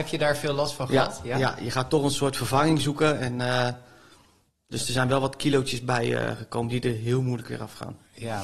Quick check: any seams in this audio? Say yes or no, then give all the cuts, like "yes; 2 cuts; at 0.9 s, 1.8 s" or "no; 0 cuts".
no; 0 cuts